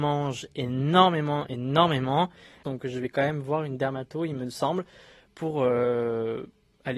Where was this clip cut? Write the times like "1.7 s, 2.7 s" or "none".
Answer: 2.6 s